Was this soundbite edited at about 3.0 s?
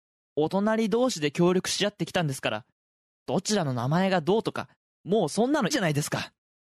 no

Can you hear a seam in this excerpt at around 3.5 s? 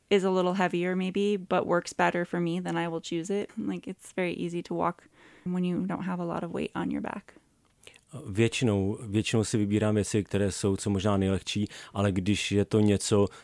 yes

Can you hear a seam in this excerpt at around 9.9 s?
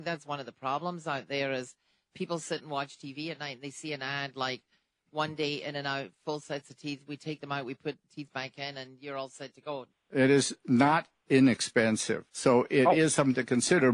yes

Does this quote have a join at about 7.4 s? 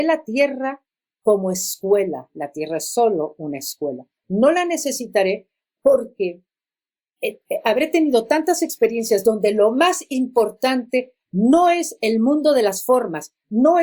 no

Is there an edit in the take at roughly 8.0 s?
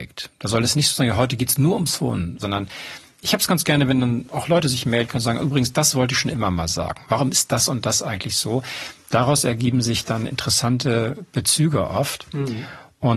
no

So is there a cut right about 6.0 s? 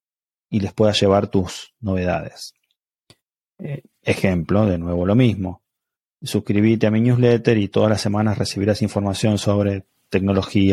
no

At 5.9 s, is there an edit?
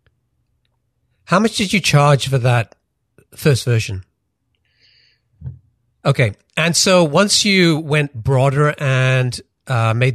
yes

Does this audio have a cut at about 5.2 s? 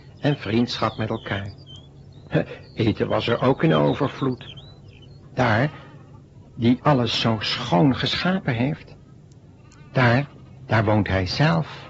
yes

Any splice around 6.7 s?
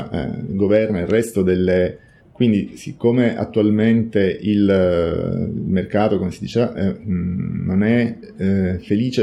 no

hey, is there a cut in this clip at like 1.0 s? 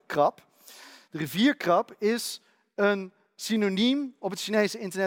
no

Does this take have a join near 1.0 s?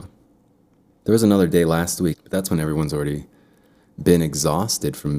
yes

